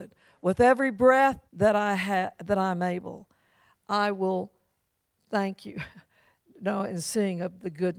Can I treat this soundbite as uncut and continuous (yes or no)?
no